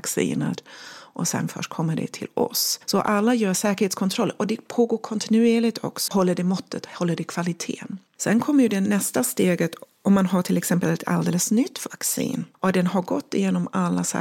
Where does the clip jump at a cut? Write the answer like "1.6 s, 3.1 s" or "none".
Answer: 6.1 s, 8.1 s, 12.5 s